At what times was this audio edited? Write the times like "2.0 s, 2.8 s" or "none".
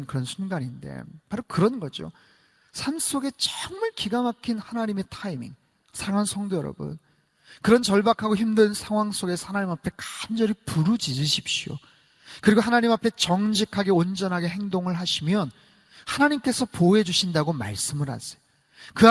5.9 s